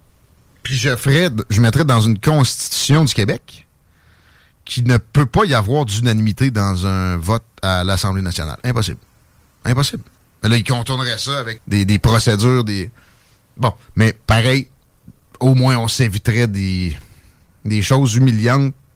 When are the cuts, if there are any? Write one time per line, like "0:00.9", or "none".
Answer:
0:11.6